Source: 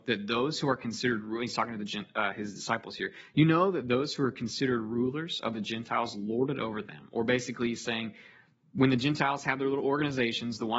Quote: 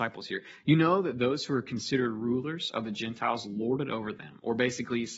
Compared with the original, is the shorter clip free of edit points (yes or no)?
yes